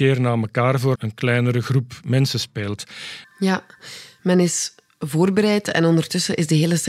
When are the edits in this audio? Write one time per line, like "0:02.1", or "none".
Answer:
0:00.9
0:03.2